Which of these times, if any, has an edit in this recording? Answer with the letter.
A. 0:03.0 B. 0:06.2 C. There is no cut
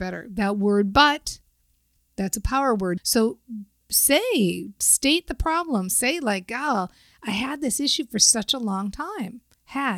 A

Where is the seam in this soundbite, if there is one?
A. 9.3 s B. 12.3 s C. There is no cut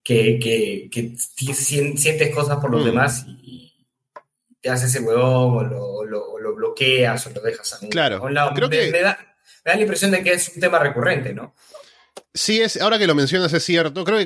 C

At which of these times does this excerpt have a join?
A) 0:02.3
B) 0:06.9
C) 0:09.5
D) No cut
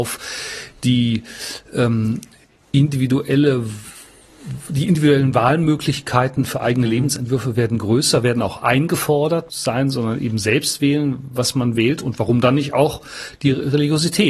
C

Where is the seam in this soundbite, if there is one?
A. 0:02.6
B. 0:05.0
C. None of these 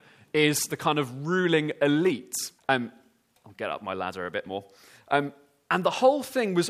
A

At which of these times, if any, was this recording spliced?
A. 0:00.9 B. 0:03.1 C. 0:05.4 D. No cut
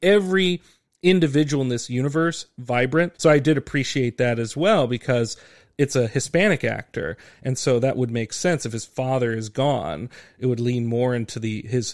B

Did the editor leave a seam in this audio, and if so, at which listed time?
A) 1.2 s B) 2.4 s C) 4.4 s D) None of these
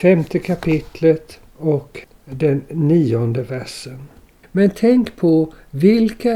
C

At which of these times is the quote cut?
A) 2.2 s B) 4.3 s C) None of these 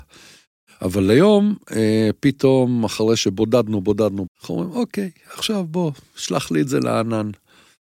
B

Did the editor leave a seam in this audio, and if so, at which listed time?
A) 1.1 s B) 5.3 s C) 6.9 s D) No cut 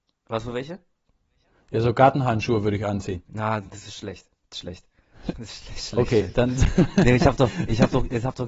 B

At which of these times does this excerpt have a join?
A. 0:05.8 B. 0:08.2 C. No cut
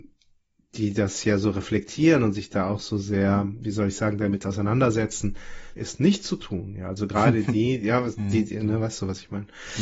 A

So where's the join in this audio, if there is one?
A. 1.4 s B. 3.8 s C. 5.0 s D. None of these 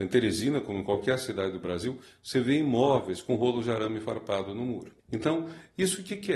C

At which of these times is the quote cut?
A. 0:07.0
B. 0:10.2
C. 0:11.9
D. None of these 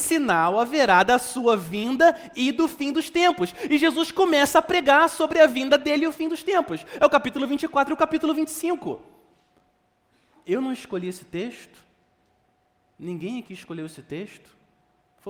D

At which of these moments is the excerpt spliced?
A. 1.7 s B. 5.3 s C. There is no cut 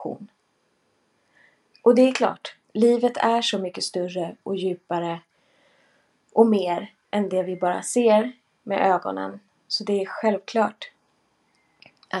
A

